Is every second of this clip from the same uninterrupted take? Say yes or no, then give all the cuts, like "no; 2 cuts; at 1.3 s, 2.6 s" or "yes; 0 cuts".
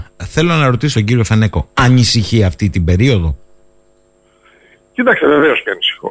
no; 1 cut; at 0.9 s